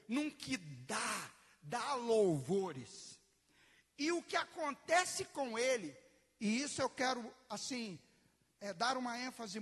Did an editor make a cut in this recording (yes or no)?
no